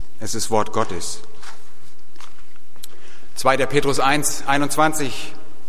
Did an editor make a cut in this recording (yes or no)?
no